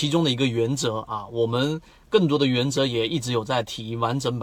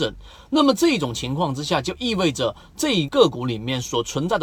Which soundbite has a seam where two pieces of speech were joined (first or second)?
second